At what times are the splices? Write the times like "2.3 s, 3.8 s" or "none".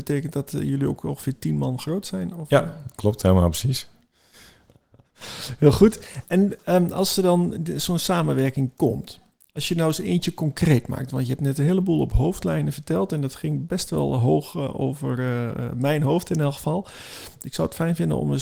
none